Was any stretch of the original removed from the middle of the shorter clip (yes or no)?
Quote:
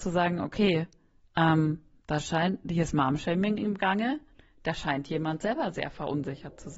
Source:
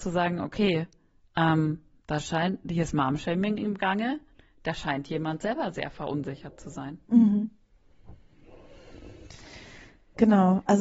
no